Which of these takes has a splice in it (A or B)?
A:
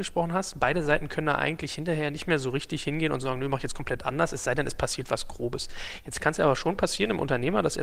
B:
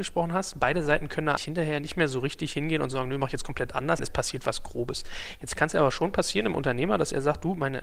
B